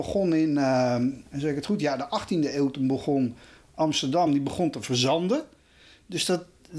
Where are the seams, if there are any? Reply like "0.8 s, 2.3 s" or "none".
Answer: 1.3 s, 4.3 s